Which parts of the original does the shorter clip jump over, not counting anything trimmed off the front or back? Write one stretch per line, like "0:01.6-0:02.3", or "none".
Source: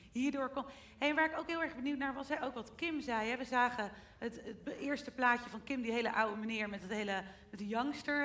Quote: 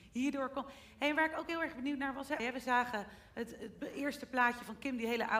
0:02.4-0:03.2